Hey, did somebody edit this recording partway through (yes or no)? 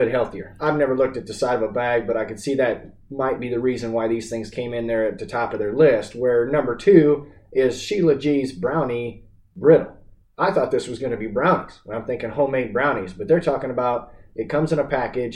no